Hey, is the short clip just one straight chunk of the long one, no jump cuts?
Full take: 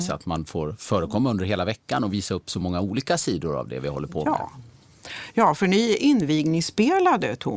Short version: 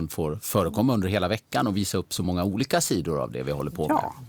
yes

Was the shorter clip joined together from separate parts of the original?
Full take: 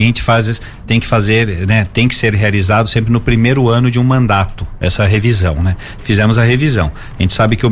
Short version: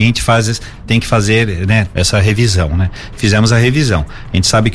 yes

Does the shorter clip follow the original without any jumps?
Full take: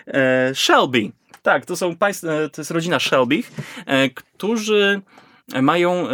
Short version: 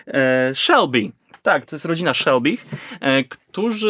no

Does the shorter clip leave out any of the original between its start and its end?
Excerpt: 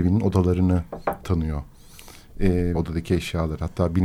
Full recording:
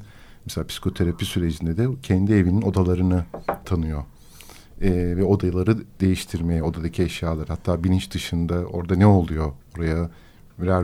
yes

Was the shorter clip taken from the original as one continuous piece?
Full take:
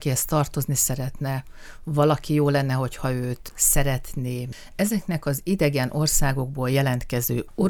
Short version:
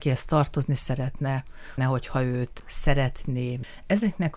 no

